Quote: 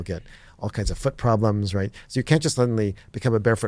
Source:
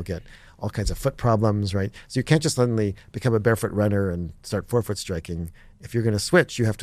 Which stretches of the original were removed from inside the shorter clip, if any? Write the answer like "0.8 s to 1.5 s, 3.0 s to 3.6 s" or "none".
none